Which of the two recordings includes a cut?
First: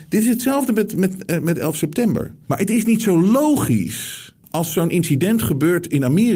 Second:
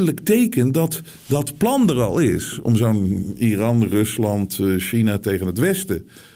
first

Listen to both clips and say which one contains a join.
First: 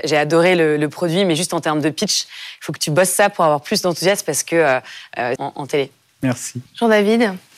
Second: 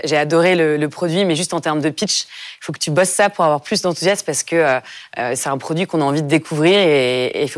first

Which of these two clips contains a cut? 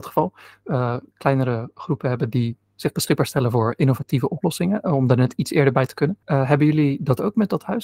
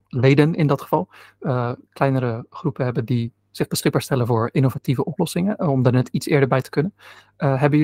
first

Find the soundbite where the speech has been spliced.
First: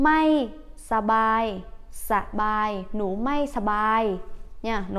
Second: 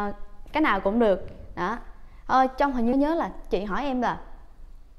second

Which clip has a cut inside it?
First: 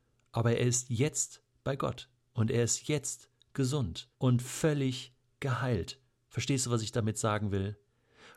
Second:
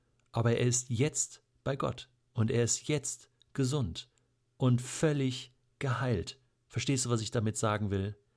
first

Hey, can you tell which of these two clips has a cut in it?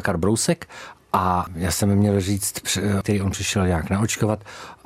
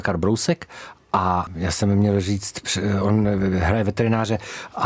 first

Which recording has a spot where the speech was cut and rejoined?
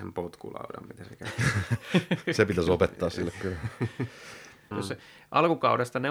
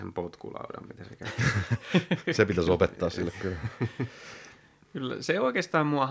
first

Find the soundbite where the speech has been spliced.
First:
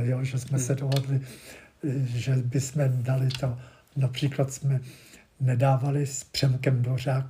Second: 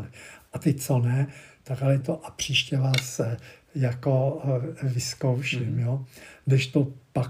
second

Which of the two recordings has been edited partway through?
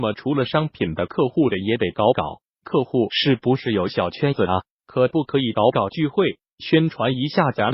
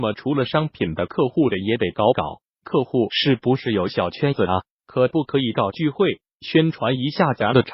second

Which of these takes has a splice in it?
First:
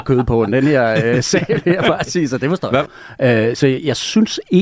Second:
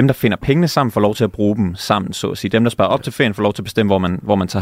first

